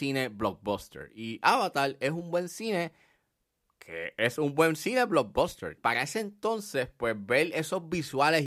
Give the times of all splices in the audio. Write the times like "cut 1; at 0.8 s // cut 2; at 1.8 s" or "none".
cut 1; at 5.8 s